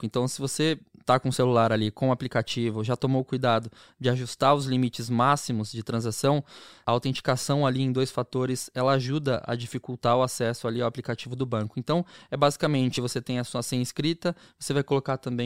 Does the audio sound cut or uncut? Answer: uncut